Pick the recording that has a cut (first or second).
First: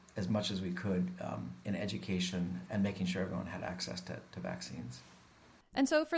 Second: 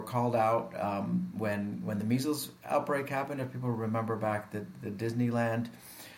first